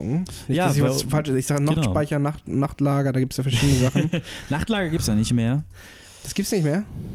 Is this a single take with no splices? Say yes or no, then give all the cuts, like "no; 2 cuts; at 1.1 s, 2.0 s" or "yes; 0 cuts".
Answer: yes; 0 cuts